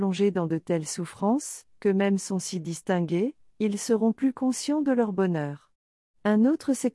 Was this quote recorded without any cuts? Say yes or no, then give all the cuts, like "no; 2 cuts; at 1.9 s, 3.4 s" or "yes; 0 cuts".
no; 1 cut; at 1.7 s